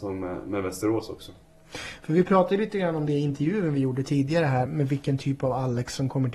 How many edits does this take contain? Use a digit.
1